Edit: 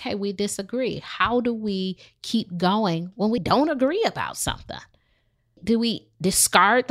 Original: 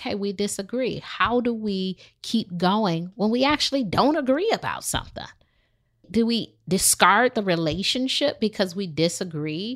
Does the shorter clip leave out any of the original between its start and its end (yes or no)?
yes